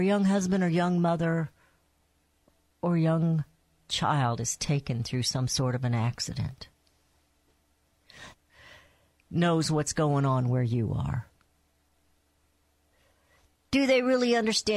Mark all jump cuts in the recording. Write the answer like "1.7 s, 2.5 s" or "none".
8.3 s